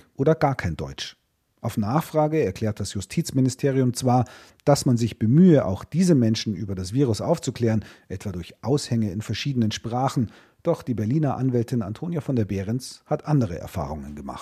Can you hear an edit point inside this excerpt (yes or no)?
no